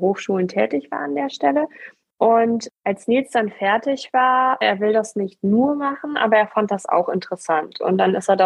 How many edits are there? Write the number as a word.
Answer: one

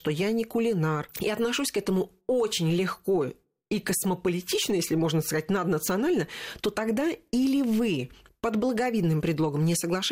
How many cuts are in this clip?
zero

